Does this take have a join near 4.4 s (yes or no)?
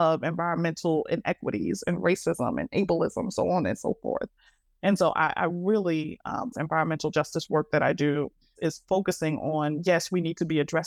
no